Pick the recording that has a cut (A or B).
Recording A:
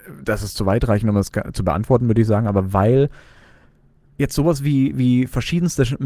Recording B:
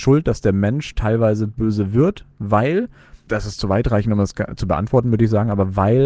B